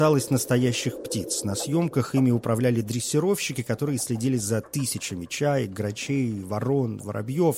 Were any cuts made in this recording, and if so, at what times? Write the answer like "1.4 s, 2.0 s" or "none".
none